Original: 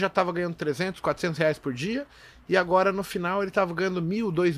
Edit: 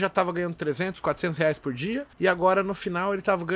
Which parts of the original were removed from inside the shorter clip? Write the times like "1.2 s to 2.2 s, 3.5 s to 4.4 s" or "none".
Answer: 2.1 s to 2.4 s